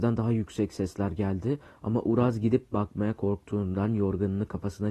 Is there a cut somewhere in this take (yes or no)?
no